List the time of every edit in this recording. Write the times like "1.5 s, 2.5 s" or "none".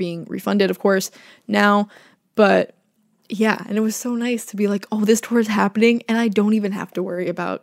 none